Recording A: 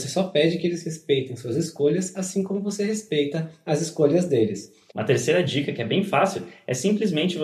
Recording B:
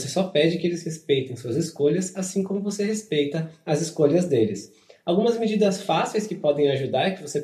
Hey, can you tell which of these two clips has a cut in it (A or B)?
A